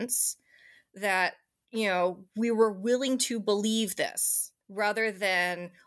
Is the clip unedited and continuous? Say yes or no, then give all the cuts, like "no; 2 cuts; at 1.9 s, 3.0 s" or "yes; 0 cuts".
no; 1 cut; at 4.6 s